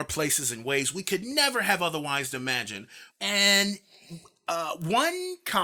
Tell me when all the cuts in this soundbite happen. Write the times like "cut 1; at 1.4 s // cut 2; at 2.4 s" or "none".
cut 1; at 3.1 s